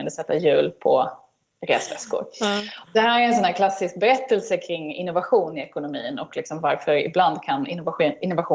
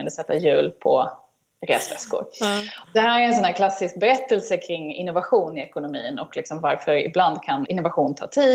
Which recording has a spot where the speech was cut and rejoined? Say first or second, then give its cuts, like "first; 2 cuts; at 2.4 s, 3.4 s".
second; 1 cut; at 7.7 s